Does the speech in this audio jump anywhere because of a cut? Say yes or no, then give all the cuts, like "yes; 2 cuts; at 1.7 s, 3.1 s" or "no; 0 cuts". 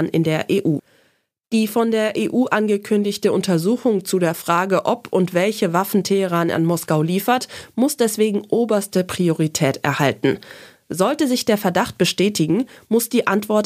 no; 0 cuts